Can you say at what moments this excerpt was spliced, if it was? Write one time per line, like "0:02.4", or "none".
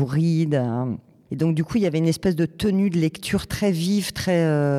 none